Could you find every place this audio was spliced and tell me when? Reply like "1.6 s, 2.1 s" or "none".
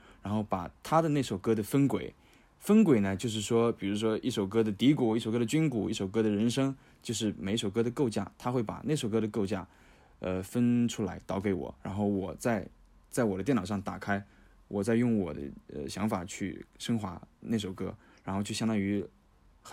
none